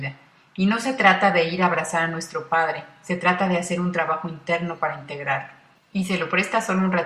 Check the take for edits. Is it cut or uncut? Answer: cut